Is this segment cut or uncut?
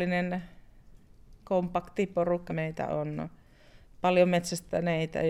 cut